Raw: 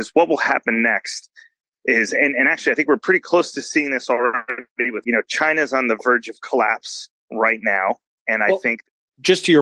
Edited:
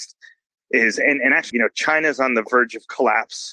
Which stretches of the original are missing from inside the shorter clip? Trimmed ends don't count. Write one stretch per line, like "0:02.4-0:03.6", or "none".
0:02.6-0:05.0